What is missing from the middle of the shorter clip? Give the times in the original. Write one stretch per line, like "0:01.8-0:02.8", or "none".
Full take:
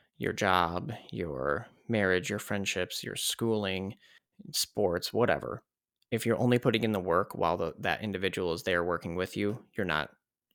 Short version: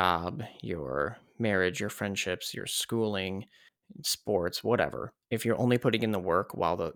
0:05.7-0:06.0